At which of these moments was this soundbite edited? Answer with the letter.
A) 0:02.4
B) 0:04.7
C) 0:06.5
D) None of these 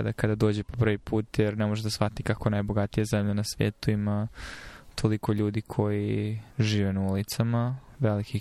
C